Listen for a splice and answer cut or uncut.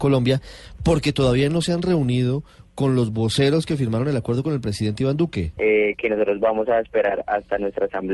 cut